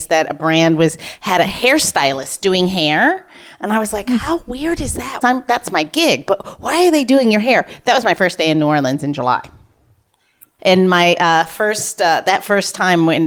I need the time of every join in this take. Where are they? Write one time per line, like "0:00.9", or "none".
0:05.2
0:10.6